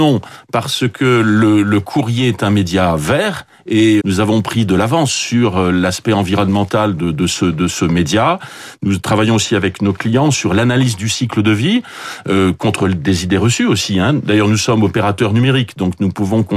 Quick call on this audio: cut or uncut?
cut